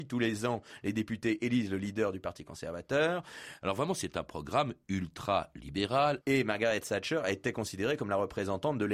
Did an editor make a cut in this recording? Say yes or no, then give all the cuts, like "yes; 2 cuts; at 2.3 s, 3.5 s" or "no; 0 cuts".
yes; 2 cuts; at 3.6 s, 6.2 s